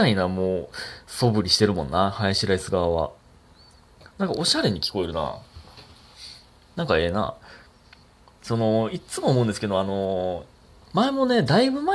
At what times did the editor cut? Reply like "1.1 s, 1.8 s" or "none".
none